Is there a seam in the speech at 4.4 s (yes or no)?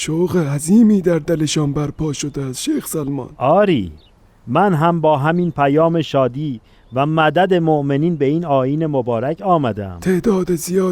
no